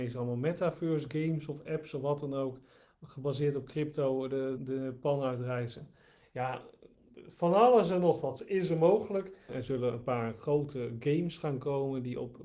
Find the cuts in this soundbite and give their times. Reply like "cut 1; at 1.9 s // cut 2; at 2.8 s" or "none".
cut 1; at 4.6 s // cut 2; at 9.5 s

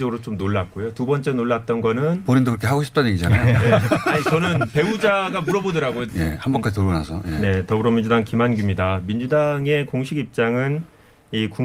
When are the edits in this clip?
cut 1; at 6.1 s

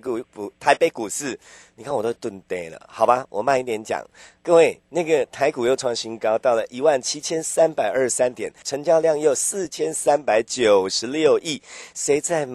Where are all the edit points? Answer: cut 1; at 8.6 s

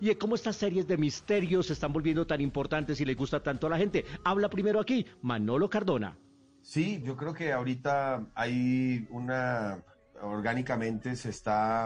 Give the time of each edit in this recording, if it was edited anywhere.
cut 1; at 7.0 s

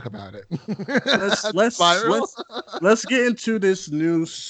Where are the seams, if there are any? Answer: none

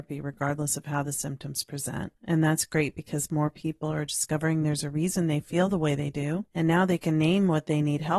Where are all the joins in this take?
cut 1; at 2.2 s

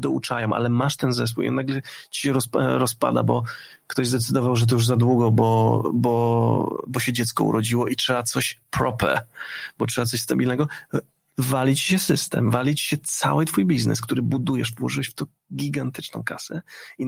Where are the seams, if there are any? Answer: none

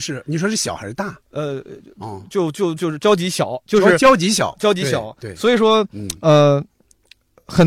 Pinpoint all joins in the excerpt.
cut 1; at 2.8 s

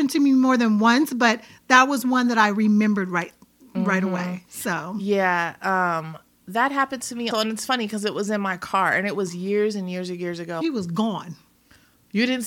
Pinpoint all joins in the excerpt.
cut 1; at 7.3 s // cut 2; at 10.6 s

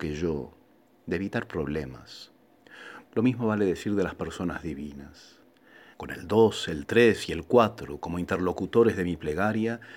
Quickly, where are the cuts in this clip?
cut 1; at 3.1 s // cut 2; at 5.9 s

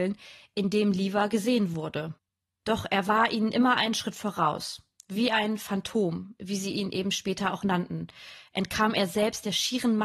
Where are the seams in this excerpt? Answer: none

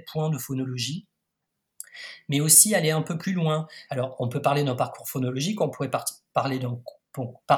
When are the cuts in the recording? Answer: cut 1; at 3.9 s

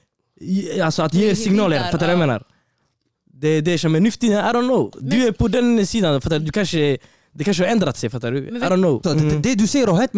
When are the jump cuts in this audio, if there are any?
cut 1; at 9.0 s

